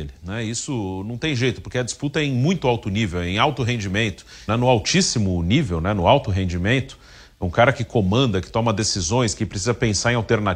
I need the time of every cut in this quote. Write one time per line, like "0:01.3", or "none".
0:04.5